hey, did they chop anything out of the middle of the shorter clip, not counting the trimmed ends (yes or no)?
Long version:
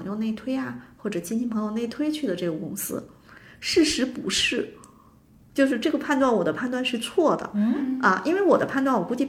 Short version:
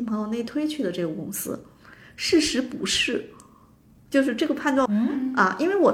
yes